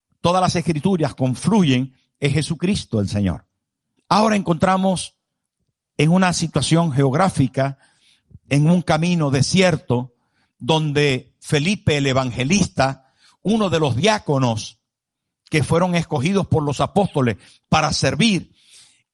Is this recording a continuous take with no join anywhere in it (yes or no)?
no